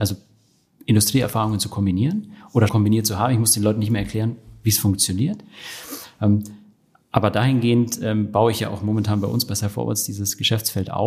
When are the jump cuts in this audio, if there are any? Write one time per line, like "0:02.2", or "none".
0:02.7